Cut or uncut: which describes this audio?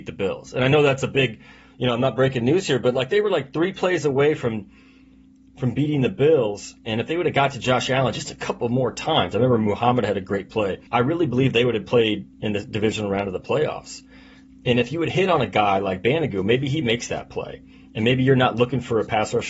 cut